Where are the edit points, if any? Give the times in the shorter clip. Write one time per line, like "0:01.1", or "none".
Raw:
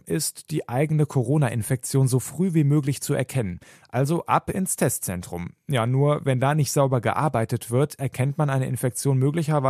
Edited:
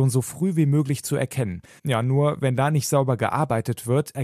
0:01.8